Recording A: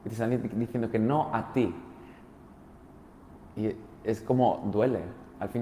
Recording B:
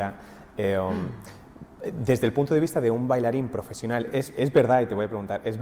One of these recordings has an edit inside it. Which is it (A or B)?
A